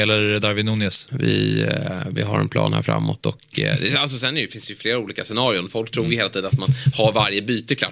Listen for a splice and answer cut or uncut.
cut